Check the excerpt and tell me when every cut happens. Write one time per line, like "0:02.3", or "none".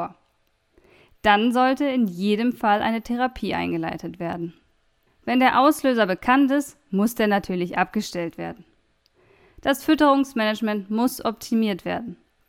0:05.1